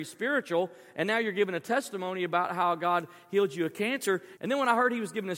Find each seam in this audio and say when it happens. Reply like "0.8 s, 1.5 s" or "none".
4.4 s